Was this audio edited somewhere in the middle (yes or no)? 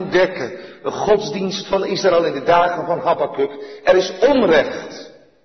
no